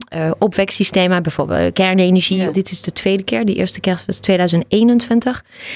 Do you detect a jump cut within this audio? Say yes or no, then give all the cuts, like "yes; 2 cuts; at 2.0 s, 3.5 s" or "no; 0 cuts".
yes; 1 cut; at 2.5 s